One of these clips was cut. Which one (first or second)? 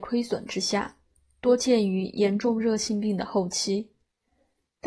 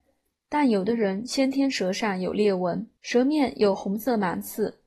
second